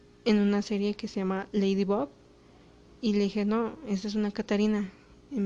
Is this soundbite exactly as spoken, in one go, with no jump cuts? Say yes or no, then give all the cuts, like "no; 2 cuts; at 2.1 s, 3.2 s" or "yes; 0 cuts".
yes; 0 cuts